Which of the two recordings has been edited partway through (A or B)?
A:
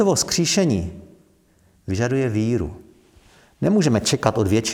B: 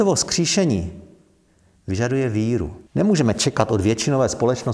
B